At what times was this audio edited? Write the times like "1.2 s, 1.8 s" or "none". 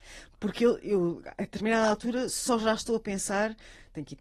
none